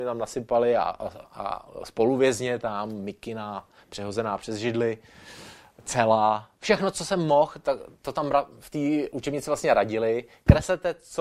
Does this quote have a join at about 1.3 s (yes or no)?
no